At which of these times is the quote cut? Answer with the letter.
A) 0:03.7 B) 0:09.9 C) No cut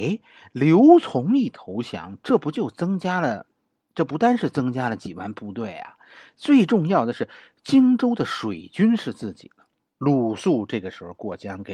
B